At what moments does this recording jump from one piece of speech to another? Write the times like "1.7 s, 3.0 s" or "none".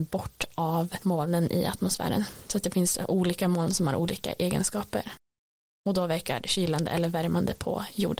none